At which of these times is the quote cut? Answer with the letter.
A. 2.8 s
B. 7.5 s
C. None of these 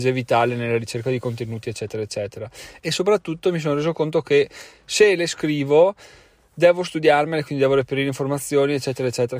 A